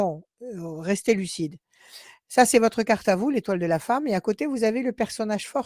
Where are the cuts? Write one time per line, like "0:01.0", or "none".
none

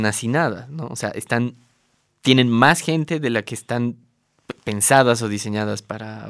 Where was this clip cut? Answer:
none

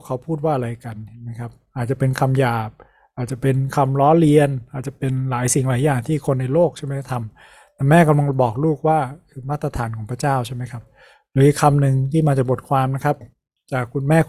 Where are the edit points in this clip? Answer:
none

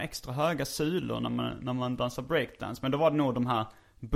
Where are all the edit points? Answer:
none

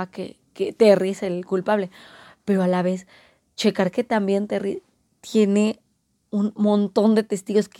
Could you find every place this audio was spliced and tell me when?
none

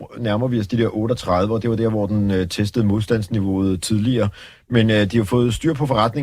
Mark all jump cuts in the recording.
none

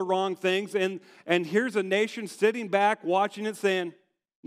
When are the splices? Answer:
none

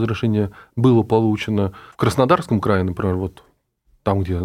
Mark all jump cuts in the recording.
none

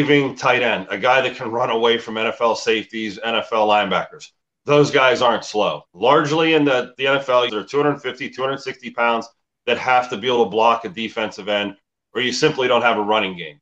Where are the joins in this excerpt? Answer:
0:05.9
0:07.5

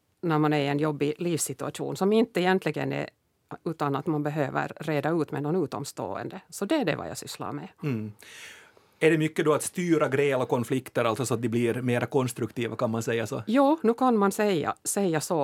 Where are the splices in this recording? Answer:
0:03.6

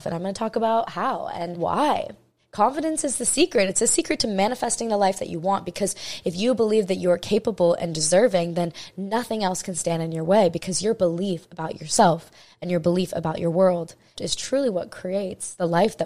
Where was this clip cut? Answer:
0:14.1

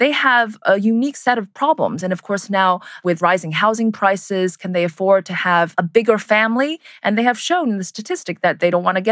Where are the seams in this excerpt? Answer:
none

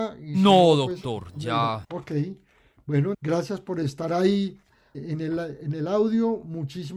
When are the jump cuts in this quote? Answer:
0:01.8
0:03.1
0:04.9

